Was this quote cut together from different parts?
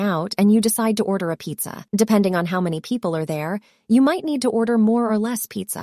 yes; 1 cut; at 1.9 s

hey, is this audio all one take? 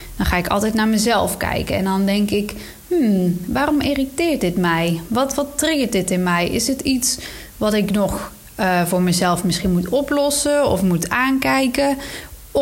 yes; 0 cuts

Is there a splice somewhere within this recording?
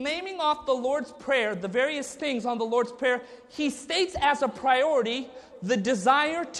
no; 0 cuts

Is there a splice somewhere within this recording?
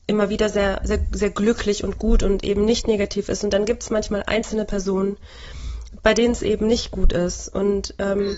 no; 0 cuts

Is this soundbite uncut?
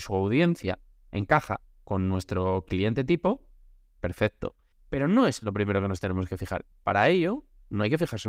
no; 2 cuts; at 4.7 s, 6.7 s

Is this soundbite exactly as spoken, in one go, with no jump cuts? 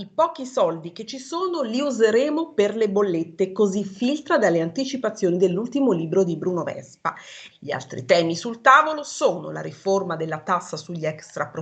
no; 1 cut; at 7.5 s

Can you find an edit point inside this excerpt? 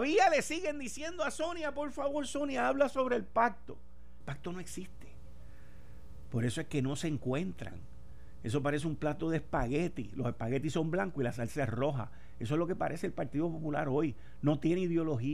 yes; 2 cuts; at 4.2 s, 6.3 s

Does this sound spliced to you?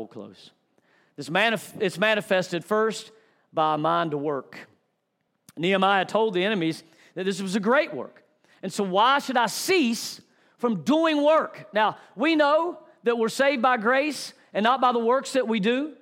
no; 0 cuts

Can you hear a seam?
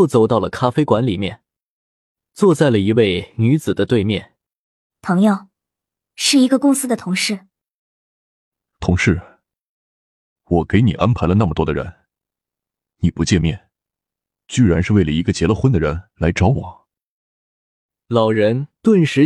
yes; 2 cuts; at 4.9 s, 10.4 s

